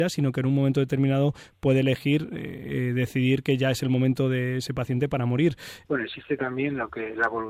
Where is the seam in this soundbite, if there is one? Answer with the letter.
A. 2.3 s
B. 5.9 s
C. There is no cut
B